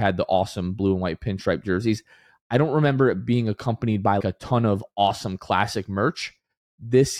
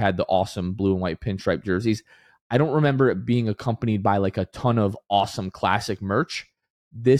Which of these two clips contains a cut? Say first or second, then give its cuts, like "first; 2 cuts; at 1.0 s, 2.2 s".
first; 1 cut; at 4.2 s